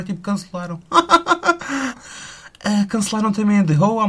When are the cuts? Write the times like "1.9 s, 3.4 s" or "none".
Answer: 1.9 s